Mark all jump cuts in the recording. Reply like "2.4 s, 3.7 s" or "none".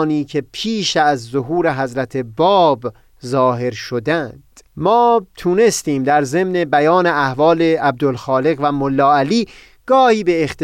4.7 s